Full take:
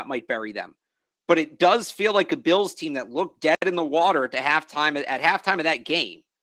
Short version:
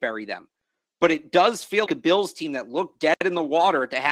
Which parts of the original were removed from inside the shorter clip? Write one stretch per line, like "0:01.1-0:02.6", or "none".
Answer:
0:02.1-0:02.3